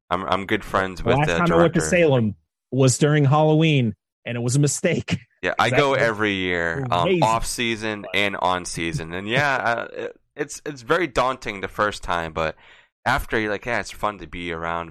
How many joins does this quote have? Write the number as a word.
one